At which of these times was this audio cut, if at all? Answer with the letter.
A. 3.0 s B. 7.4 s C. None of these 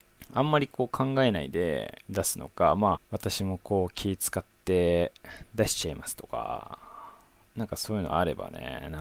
A